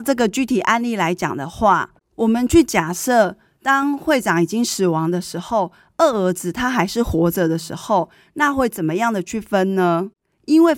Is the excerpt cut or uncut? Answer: uncut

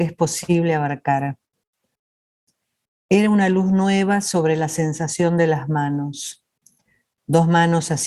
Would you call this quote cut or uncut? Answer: cut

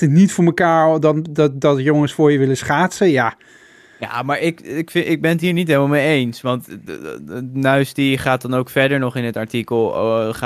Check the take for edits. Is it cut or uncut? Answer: uncut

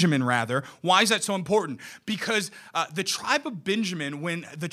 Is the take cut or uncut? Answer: uncut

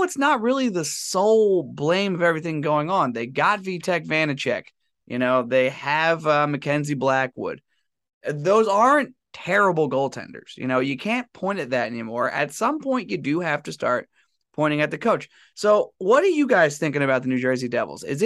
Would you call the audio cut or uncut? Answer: uncut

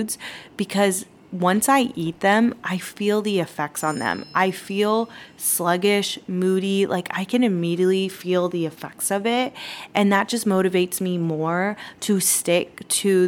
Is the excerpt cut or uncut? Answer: uncut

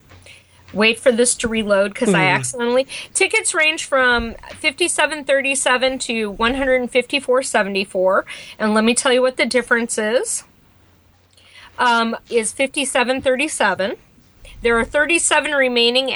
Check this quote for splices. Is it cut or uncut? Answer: cut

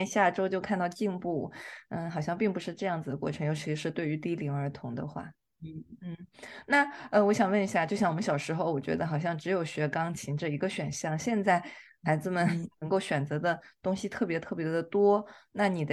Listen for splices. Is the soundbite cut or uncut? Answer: uncut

